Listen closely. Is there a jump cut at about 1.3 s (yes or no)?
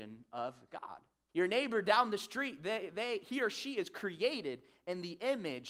yes